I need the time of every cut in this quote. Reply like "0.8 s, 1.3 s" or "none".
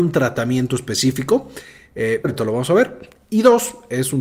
2.2 s

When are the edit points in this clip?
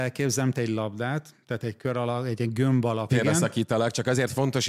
3.1 s

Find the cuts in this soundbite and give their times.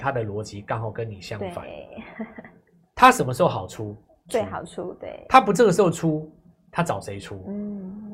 4.3 s

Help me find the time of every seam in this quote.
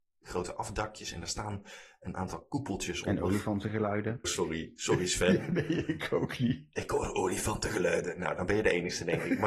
4.2 s

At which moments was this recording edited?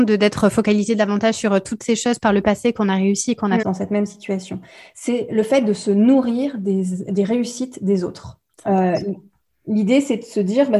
3.6 s

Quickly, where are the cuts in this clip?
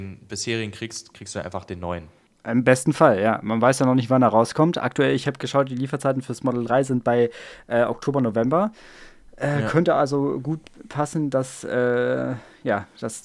none

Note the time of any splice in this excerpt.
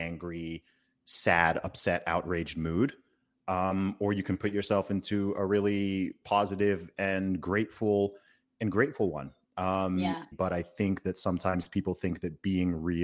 10.3 s

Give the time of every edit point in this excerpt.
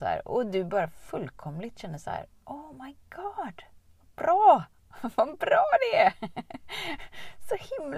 none

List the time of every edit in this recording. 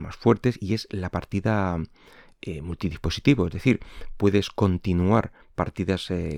none

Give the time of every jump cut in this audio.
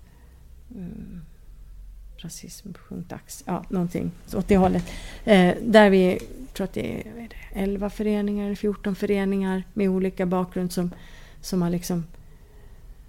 none

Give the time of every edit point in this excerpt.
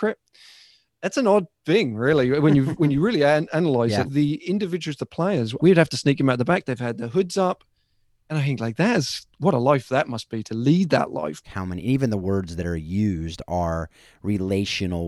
4.1 s, 5.6 s, 11.4 s

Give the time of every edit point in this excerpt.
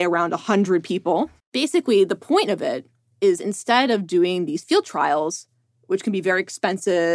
1.4 s

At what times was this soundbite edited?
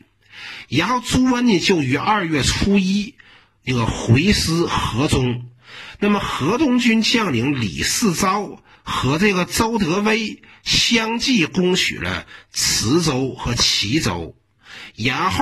8.7 s

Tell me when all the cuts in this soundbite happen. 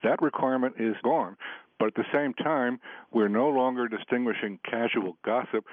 1.0 s

